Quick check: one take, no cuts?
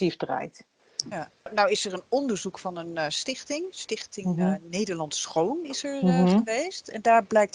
yes; 0 cuts

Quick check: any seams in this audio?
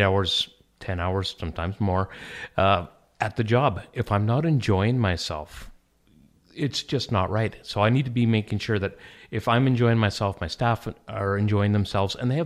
no; 0 cuts

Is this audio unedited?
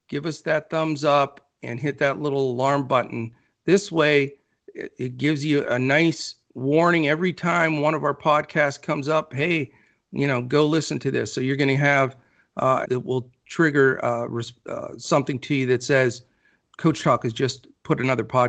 no; 2 cuts; at 12.8 s, 16.6 s

